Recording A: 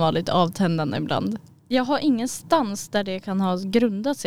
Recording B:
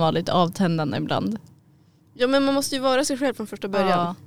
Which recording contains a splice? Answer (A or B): A